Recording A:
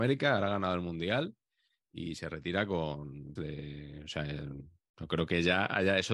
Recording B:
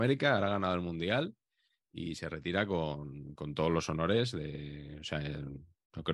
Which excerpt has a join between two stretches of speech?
A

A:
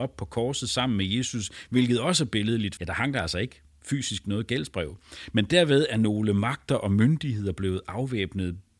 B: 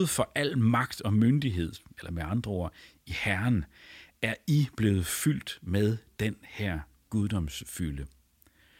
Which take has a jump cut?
A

